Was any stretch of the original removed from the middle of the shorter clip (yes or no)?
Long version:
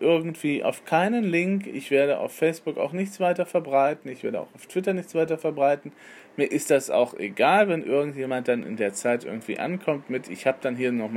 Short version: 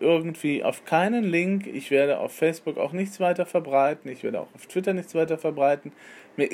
no